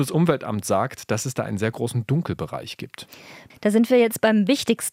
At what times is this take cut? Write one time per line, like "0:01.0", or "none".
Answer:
0:03.5